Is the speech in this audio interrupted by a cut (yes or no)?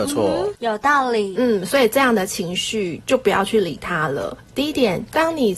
yes